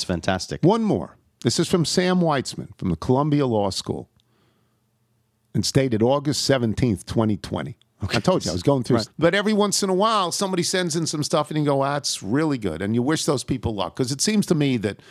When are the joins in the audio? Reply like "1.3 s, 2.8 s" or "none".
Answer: 9.1 s